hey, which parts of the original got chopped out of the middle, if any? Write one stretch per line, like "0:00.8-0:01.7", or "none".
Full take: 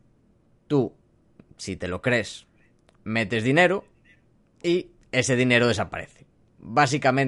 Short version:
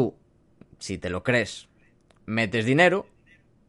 none